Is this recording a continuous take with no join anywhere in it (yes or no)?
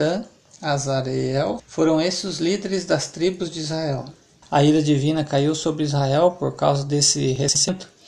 no